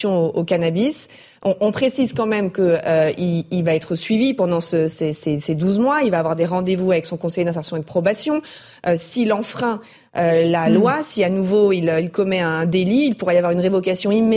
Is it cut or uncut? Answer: uncut